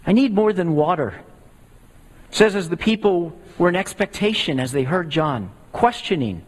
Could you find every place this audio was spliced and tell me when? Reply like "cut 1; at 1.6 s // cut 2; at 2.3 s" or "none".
cut 1; at 2.2 s